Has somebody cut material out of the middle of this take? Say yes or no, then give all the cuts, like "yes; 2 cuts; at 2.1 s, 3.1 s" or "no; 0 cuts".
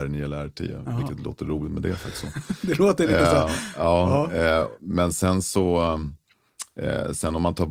no; 0 cuts